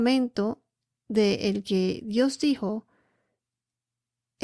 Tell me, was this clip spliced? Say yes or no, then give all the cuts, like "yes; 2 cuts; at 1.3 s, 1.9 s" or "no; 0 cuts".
no; 0 cuts